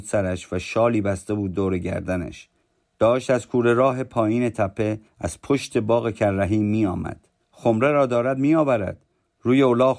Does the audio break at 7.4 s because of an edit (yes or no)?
yes